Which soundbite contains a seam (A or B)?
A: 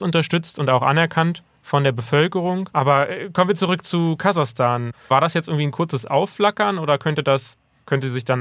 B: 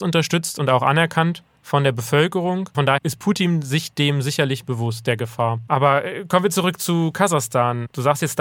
A